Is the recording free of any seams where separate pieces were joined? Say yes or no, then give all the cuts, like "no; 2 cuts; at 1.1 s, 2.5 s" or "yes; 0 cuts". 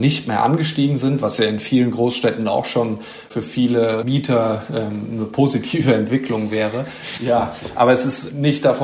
no; 1 cut; at 7.2 s